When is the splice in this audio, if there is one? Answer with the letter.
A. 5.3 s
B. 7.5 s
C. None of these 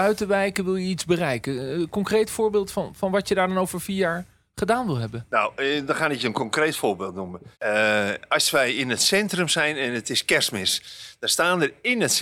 B